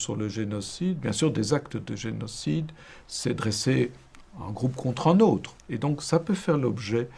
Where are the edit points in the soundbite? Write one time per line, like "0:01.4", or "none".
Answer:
none